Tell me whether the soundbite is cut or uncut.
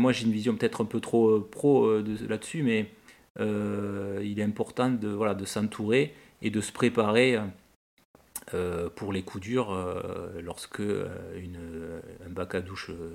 uncut